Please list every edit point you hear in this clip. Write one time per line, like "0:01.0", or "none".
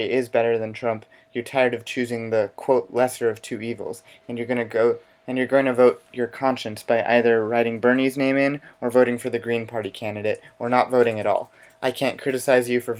none